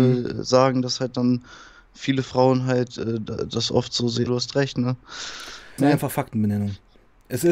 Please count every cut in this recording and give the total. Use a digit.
2